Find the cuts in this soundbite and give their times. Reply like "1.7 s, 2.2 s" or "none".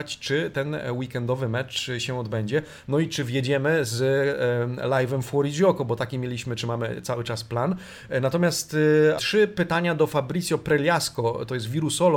9.2 s